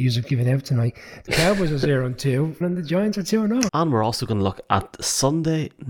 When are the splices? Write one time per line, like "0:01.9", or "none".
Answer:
0:02.6
0:03.7